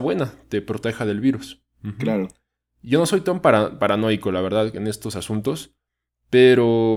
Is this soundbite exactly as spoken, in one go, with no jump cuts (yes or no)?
yes